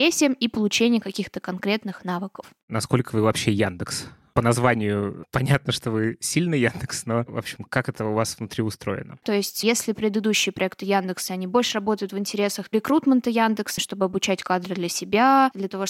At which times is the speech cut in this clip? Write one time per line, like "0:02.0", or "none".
0:09.2
0:13.8

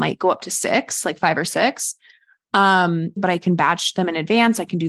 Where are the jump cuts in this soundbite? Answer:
0:03.2

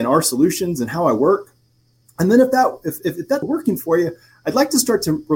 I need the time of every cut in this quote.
0:03.4

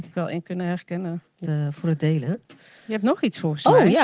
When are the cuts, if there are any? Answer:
0:01.4

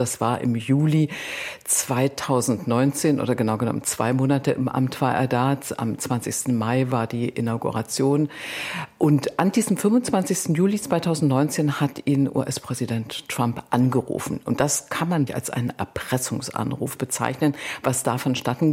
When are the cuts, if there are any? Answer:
0:15.3

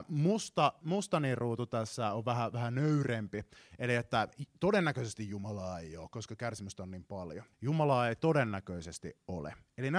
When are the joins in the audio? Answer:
0:07.5

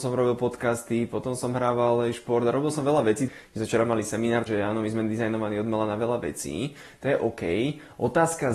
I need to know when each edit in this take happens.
0:03.3
0:04.5

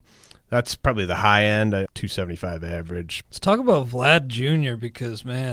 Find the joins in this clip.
0:01.9
0:03.2

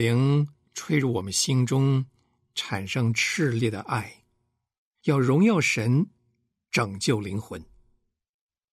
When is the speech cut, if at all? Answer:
none

